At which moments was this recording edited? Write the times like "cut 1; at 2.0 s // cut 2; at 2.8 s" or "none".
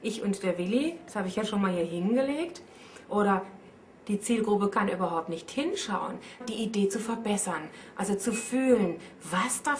cut 1; at 3.0 s // cut 2; at 6.4 s